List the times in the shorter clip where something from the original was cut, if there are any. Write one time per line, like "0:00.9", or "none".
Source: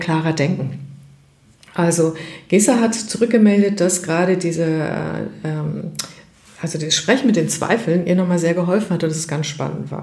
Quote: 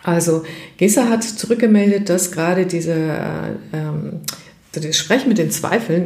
0:04.7